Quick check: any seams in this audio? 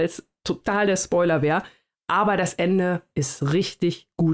no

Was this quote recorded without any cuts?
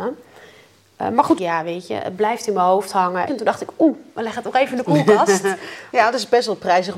no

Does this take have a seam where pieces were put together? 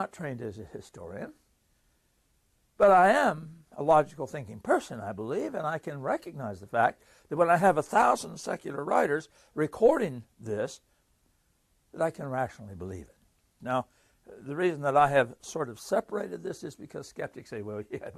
yes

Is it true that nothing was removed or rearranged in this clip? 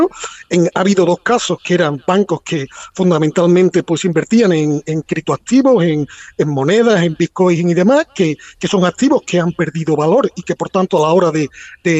yes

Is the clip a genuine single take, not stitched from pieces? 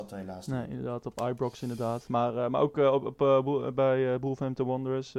yes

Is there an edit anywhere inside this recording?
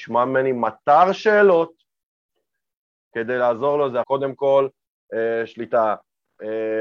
yes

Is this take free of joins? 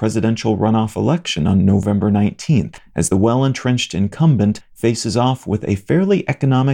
yes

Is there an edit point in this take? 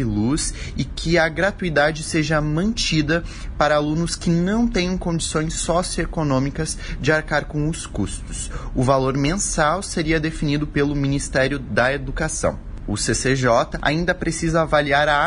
yes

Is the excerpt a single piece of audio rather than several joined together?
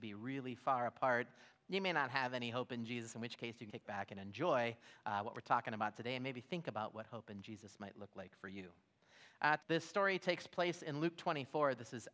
no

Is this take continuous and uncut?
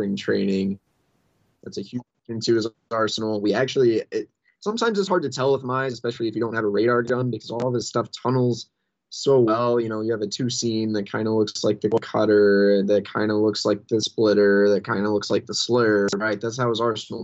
no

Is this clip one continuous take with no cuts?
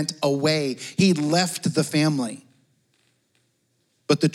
yes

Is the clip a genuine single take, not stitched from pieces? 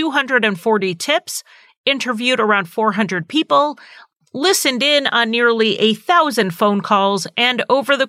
yes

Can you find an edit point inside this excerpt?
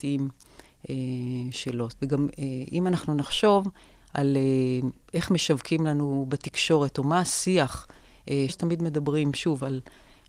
yes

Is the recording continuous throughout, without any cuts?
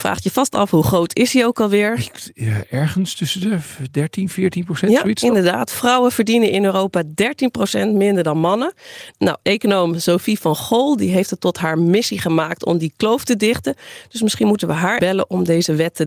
no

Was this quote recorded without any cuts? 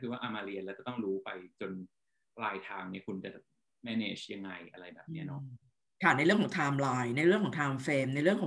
yes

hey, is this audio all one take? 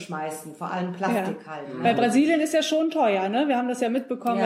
yes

